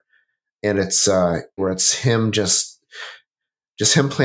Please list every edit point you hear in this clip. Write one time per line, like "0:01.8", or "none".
0:01.6